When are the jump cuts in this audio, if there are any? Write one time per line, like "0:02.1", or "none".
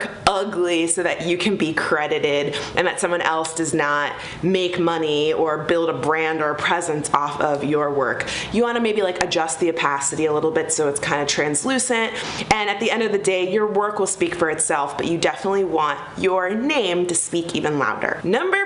none